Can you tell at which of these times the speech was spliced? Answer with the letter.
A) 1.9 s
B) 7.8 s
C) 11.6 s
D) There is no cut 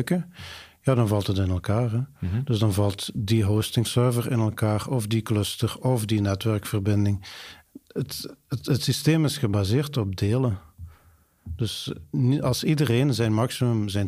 D